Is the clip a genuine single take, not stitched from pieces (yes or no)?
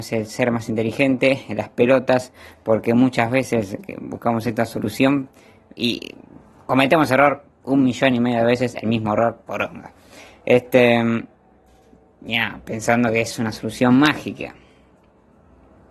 yes